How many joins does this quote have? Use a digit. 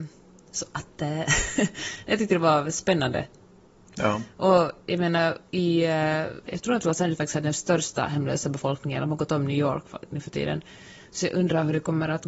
1